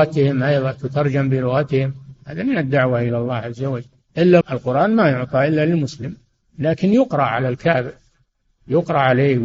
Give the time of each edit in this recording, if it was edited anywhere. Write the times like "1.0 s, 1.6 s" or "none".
4.4 s